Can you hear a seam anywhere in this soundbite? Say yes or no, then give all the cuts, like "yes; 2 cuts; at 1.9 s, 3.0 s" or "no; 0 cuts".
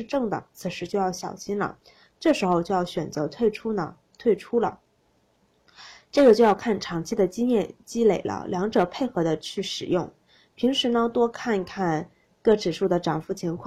no; 0 cuts